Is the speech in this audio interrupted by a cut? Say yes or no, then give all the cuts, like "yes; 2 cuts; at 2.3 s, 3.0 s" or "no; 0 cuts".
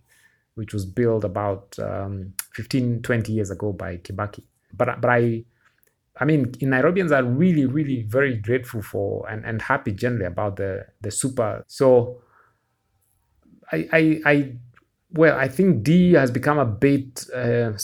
yes; 2 cuts; at 4.7 s, 11.6 s